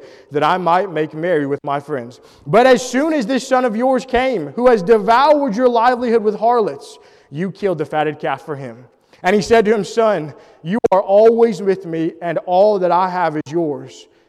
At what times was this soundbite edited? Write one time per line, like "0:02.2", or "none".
none